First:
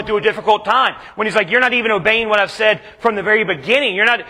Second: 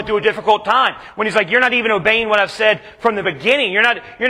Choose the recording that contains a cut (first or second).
second